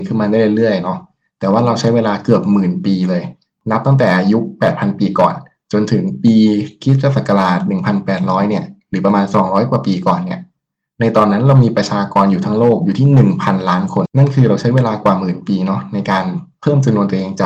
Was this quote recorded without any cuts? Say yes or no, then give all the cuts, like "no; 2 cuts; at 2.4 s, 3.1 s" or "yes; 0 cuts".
no; 1 cut; at 14.1 s